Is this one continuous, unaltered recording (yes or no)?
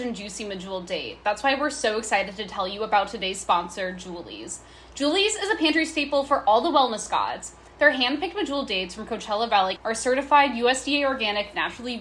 no